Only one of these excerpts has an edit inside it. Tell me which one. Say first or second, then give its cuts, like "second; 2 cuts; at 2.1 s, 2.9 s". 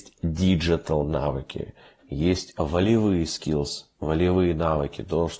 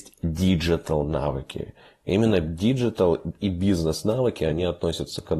first; 1 cut; at 2.0 s